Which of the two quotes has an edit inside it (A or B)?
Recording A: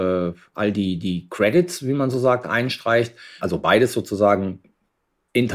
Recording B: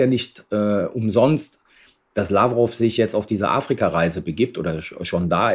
A